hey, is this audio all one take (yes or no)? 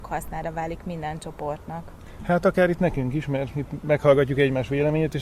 yes